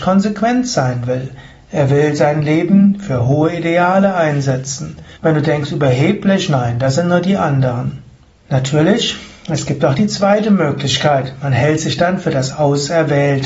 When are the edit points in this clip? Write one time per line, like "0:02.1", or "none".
0:05.2
0:08.3